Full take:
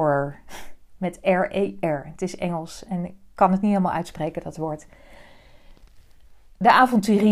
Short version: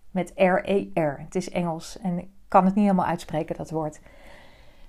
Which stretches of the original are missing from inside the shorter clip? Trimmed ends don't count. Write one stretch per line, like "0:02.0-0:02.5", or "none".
none